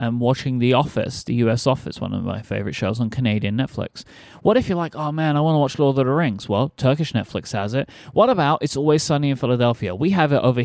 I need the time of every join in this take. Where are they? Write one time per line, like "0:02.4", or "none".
none